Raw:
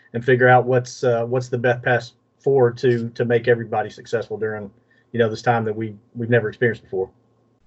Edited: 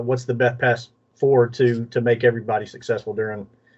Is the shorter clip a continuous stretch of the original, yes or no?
yes